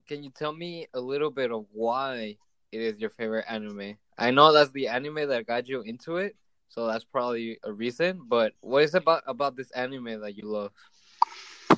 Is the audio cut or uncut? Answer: cut